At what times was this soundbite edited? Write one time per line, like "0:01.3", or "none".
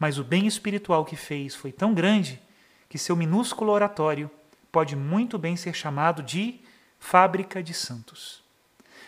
none